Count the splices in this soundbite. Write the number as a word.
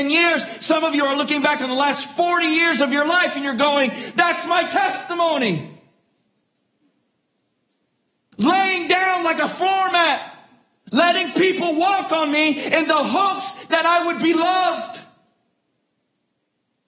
zero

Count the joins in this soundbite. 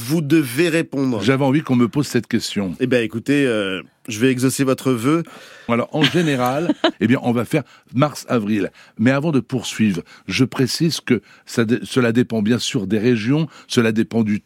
two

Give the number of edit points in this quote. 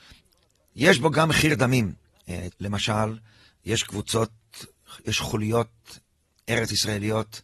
one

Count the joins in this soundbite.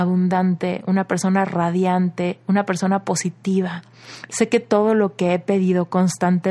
one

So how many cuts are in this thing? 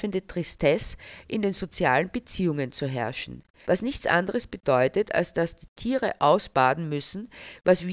one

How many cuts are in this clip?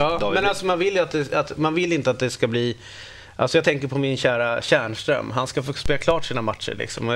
zero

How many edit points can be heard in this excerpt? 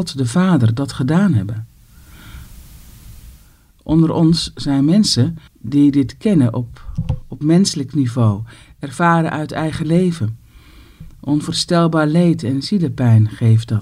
one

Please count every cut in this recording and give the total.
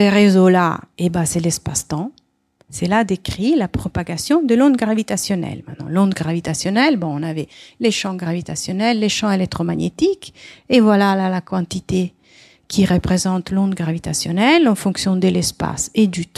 one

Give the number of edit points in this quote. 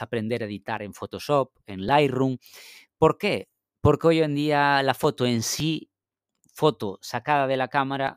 zero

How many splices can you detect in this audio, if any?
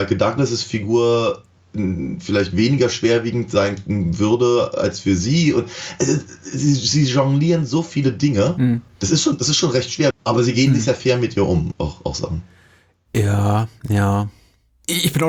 two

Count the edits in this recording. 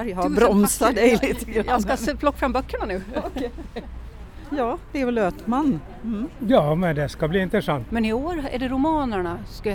two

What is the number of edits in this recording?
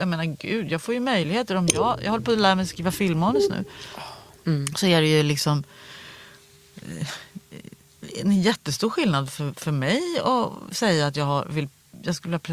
zero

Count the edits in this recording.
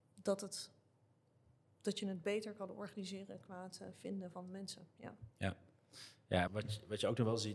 one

